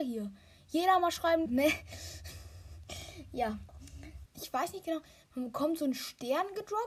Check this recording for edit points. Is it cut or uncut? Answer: cut